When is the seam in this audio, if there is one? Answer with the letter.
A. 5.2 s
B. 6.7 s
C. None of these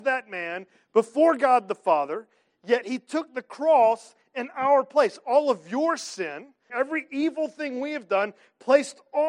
B